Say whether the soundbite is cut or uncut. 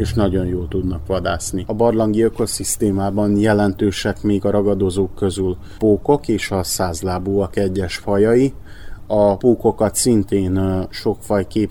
cut